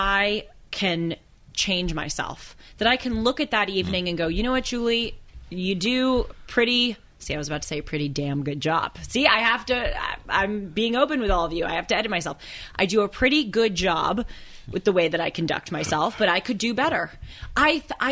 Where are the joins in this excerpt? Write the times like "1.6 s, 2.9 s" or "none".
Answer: none